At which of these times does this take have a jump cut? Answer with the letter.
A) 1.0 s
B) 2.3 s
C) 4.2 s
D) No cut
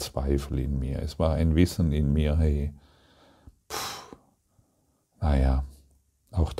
D